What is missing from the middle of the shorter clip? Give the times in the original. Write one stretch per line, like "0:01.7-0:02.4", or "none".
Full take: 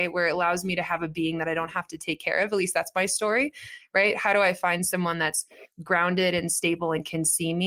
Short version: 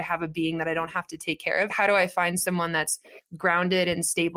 0:02.5-0:04.2